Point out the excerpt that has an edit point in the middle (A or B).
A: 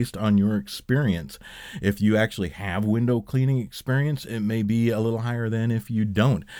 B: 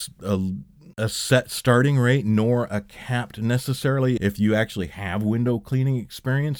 B